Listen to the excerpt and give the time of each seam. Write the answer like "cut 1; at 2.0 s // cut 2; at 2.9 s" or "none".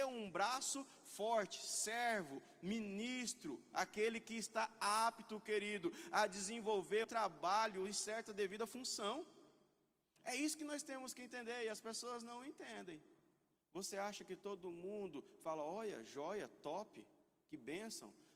cut 1; at 7.0 s // cut 2; at 13.5 s